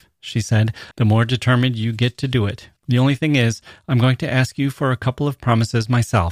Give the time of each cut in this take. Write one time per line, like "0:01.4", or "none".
0:00.9
0:02.8

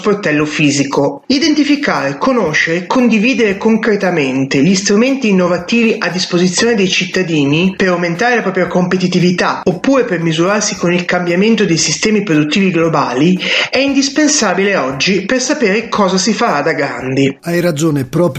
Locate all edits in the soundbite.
none

